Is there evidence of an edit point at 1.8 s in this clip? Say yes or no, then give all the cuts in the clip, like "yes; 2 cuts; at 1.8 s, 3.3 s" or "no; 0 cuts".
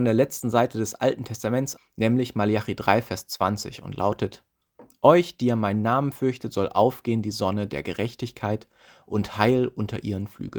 yes; 1 cut; at 1.8 s